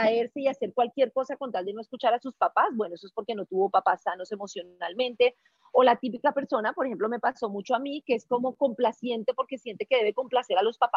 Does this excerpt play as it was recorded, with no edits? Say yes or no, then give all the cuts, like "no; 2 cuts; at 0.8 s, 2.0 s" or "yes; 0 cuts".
yes; 0 cuts